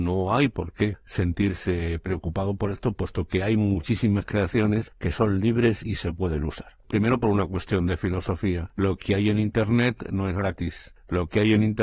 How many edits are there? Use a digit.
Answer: 1